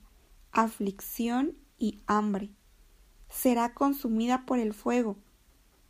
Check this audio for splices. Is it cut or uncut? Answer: uncut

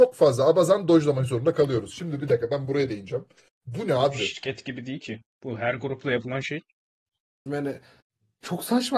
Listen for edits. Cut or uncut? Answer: cut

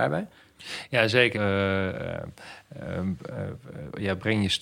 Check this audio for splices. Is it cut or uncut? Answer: cut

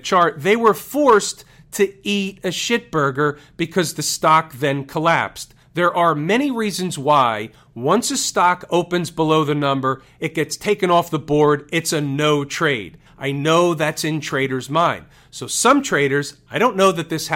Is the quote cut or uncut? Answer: cut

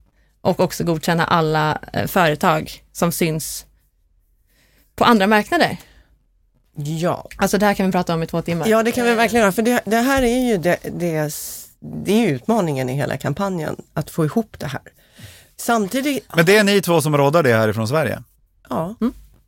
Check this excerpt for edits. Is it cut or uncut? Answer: uncut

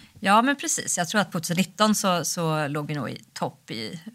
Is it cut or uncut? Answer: cut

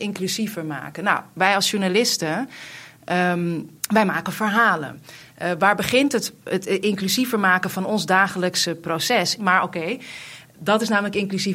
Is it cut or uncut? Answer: cut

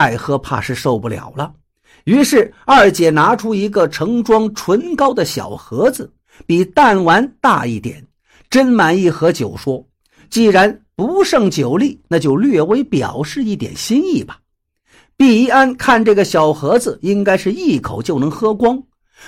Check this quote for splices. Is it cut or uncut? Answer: uncut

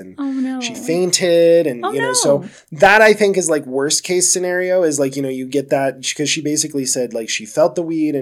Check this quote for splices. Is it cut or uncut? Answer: uncut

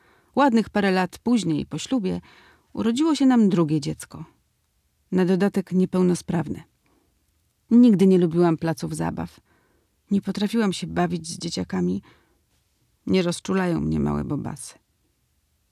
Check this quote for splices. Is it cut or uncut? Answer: uncut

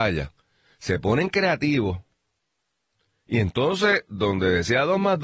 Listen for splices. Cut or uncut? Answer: uncut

